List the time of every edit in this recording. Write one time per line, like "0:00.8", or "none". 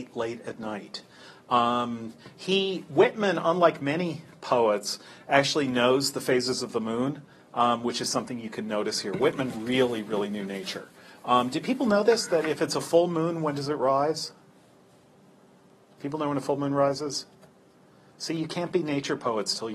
none

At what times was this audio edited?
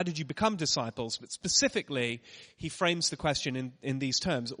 none

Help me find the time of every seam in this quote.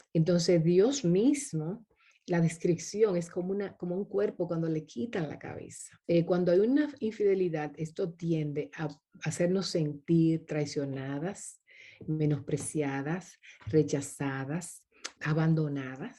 0:06.0
0:15.2

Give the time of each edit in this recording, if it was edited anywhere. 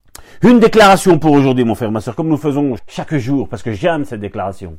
0:02.8

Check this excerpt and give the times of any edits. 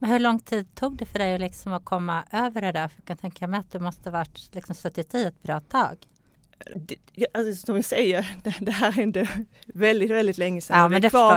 0:06.7

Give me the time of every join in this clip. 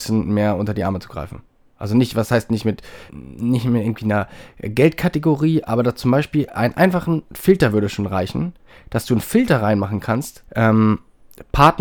0:03.1
0:10.5

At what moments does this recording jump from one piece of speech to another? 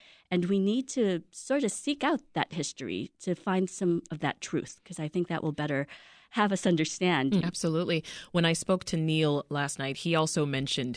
0:07.4

